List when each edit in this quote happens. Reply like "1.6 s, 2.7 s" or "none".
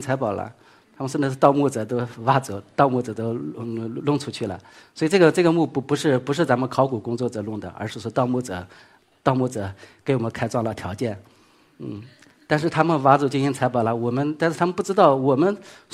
none